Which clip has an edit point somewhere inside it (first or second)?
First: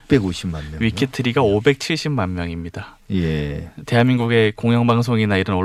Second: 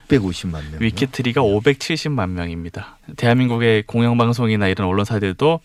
second